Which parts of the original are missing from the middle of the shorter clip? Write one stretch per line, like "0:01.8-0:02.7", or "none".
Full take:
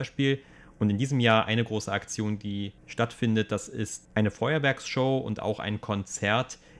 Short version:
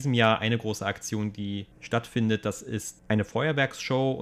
none